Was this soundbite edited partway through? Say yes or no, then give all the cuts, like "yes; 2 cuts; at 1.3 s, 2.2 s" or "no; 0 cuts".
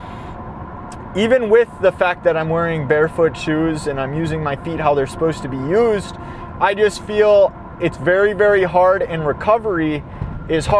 no; 0 cuts